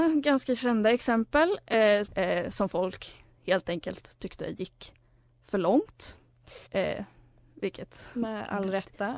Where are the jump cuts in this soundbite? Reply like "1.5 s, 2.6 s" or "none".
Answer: 2.1 s, 6.7 s